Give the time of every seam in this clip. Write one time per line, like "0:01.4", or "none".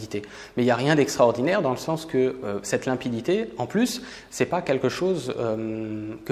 none